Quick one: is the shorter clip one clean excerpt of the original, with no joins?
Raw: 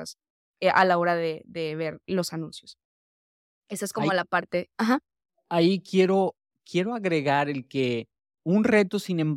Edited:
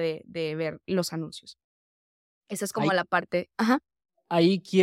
yes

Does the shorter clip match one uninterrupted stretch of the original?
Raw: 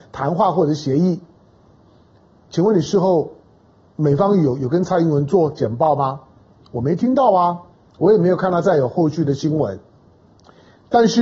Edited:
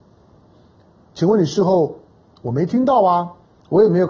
no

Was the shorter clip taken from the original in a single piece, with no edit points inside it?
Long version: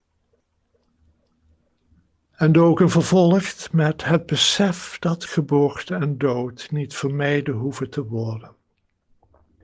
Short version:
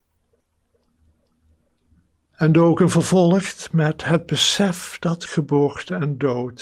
yes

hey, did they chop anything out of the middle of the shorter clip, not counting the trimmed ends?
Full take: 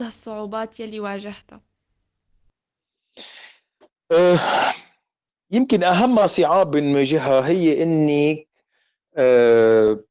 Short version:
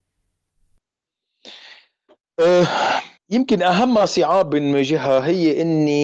yes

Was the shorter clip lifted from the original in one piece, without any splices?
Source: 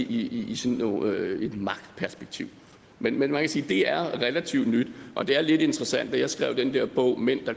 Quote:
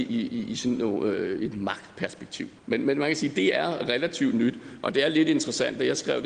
no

